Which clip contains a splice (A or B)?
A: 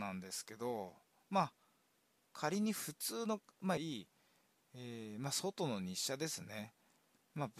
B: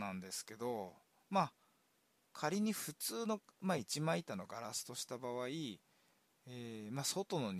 A